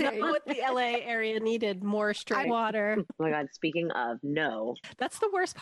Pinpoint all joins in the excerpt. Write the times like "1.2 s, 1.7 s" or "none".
2.4 s

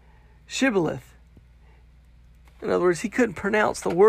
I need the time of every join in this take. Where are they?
2.5 s

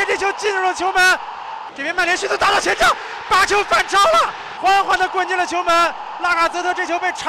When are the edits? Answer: 1.7 s, 4.6 s

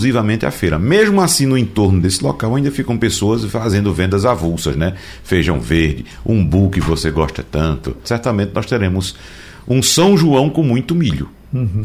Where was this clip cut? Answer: 8.0 s

